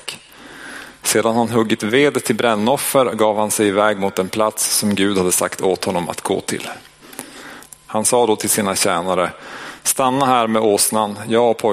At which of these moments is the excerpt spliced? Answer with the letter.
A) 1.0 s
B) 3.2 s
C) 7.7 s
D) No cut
C